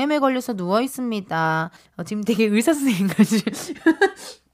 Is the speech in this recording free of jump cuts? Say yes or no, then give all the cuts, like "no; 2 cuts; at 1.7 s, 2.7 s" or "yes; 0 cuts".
no; 1 cut; at 1.8 s